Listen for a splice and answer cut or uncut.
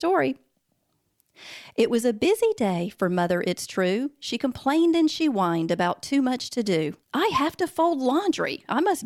cut